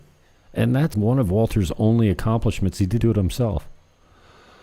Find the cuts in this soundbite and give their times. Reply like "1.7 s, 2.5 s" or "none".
0.9 s, 3.0 s